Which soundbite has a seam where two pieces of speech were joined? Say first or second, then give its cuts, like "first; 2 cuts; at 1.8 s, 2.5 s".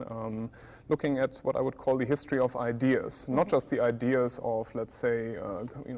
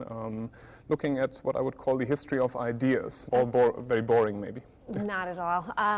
second; 1 cut; at 3.3 s